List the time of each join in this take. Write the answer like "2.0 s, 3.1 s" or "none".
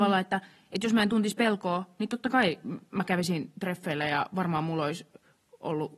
none